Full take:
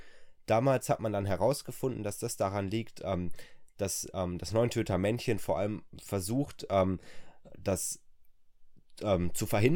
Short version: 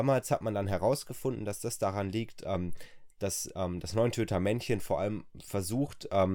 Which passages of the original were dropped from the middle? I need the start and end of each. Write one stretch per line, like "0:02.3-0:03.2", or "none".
none